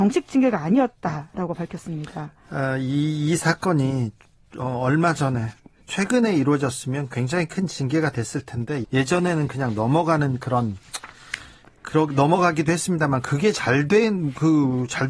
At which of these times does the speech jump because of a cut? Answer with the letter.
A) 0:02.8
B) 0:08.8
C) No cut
B